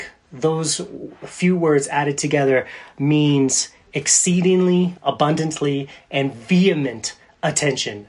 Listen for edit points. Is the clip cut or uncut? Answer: cut